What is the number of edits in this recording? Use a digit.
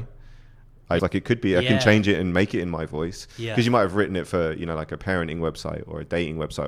1